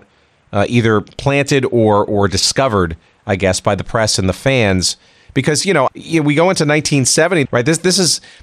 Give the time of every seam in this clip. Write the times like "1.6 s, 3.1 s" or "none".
5.9 s, 7.5 s